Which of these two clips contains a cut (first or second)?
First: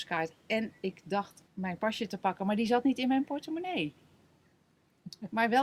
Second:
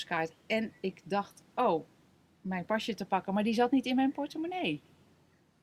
first